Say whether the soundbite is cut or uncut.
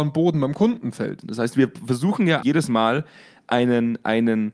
cut